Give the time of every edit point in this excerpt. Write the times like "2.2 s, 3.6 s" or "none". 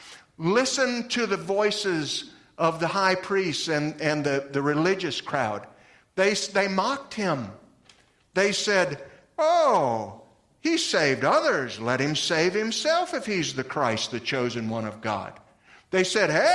none

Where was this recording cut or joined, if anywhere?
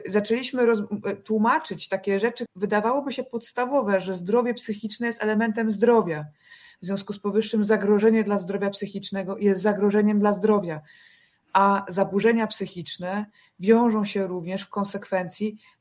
2.5 s

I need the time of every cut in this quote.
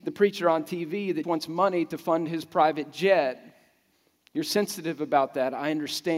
1.2 s

